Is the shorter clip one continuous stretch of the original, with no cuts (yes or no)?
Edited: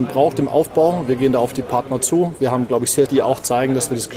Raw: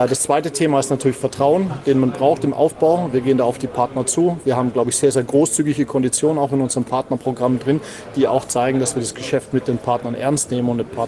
no